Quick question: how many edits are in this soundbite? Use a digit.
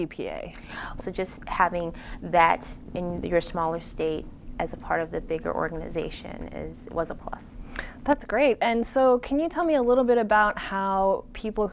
1